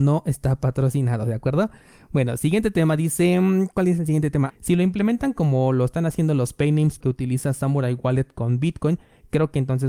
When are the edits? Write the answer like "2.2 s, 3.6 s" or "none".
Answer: 4.5 s, 7.0 s